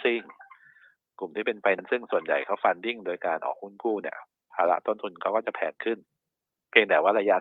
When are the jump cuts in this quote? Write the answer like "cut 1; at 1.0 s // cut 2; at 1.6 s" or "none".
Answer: cut 1; at 1.8 s